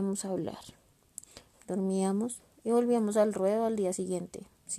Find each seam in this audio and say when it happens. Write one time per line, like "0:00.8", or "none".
0:01.5

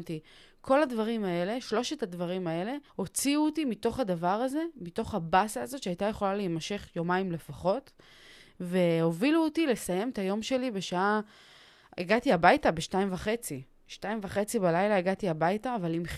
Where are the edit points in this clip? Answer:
0:02.9

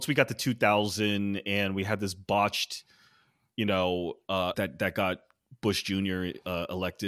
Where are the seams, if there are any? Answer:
0:04.5

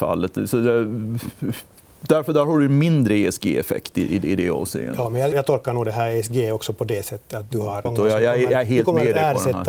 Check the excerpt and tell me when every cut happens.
0:05.3
0:07.9

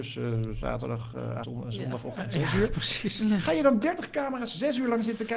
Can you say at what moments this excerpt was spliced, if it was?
0:01.4

